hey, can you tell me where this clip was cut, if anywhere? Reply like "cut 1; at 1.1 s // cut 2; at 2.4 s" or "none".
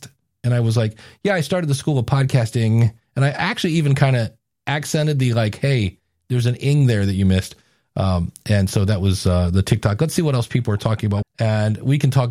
cut 1; at 11.2 s